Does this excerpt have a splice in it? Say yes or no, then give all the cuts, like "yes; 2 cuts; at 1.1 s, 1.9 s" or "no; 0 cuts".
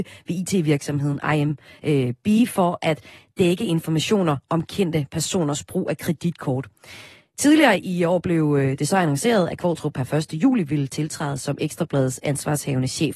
no; 0 cuts